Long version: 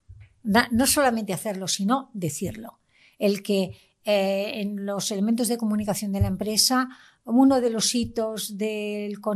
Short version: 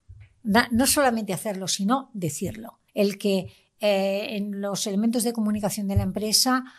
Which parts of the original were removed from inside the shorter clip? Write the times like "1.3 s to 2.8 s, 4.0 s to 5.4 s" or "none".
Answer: 2.9 s to 3.1 s